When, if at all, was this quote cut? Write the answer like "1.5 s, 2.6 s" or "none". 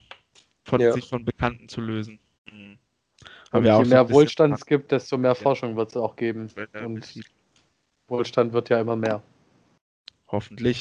2.3 s